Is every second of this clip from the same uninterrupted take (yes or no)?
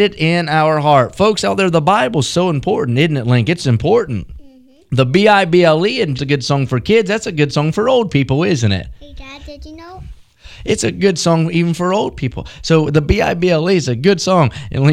no